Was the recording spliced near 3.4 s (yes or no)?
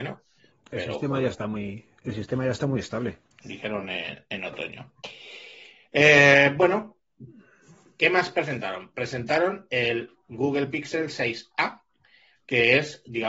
yes